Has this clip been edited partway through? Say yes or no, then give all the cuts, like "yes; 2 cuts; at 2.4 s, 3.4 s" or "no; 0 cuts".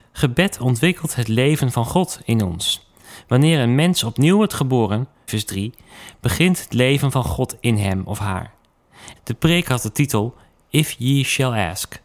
yes; 2 cuts; at 5.3 s, 9.2 s